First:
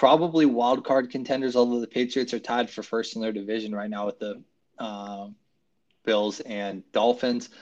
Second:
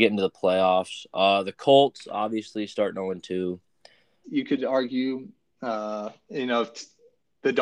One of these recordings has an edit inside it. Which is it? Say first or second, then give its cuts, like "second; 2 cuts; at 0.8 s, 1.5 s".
second; 1 cut; at 4.2 s